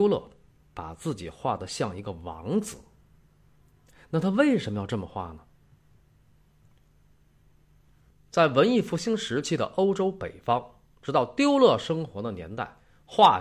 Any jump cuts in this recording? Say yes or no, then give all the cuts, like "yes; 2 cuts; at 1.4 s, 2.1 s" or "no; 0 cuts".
no; 0 cuts